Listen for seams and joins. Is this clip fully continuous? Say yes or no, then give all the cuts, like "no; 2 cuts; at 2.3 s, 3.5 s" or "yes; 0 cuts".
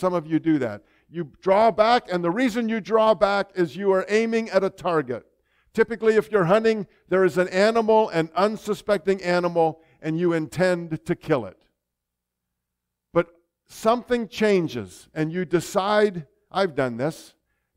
yes; 0 cuts